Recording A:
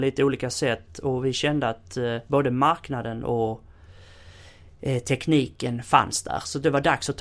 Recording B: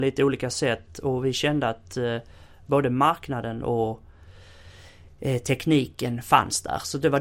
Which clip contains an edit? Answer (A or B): A